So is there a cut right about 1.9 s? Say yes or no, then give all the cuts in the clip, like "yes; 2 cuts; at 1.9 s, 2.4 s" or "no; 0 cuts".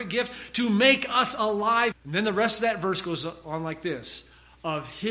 yes; 1 cut; at 1.9 s